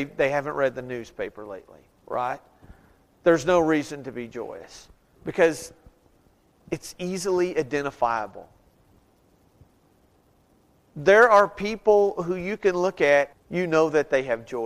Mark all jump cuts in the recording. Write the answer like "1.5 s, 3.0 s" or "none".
5.1 s, 13.3 s